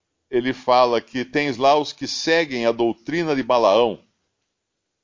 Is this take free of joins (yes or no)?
yes